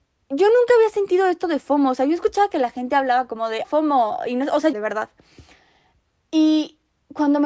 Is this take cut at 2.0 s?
no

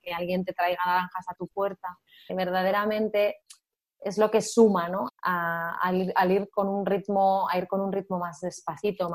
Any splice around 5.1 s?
yes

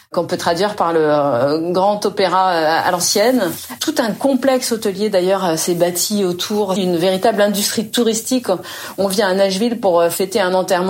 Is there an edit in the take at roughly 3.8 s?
yes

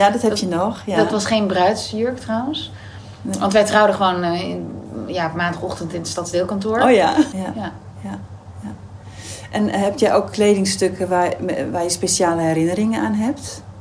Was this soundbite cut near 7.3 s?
yes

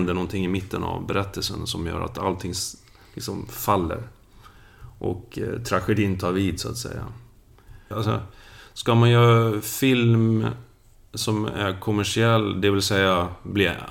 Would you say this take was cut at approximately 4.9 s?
no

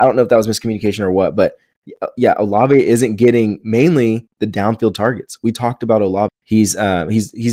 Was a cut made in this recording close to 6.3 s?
yes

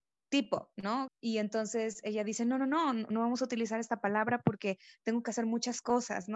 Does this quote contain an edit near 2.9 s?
no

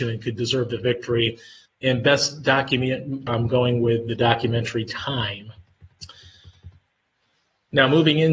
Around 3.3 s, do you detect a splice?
yes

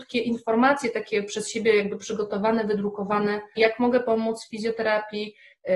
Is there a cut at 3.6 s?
yes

